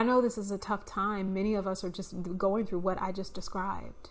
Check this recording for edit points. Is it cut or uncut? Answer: uncut